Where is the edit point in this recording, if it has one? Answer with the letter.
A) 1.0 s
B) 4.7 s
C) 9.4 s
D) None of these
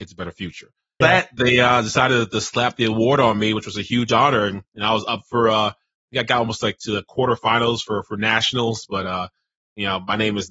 A